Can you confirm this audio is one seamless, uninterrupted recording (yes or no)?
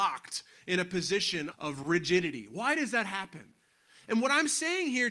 no